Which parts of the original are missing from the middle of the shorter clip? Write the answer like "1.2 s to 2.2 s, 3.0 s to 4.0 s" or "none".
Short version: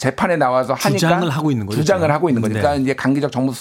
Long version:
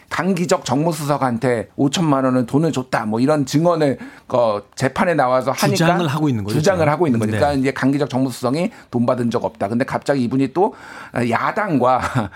none